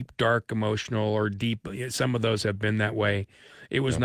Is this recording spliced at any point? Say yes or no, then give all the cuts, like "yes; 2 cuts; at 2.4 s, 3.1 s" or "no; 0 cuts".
no; 0 cuts